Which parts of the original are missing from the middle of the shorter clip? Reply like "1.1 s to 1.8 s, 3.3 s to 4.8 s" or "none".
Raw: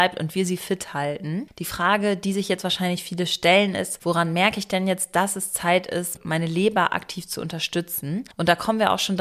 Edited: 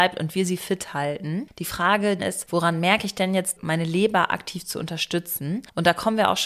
2.2 s to 3.7 s, 5.1 s to 6.2 s